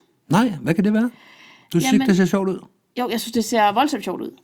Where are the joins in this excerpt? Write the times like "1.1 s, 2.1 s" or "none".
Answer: none